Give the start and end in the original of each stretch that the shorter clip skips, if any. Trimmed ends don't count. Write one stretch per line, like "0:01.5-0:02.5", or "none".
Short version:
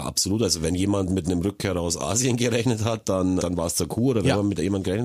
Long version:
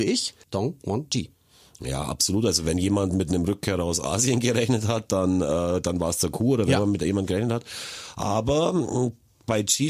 0:05.4-0:05.8